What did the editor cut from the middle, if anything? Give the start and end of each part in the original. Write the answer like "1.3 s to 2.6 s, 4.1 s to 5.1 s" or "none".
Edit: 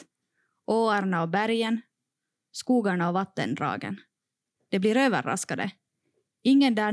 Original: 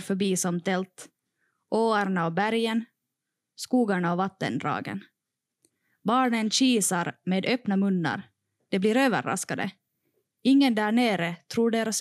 5.6 s to 8.6 s